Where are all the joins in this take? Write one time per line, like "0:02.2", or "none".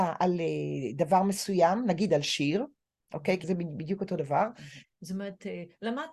0:03.4
0:04.8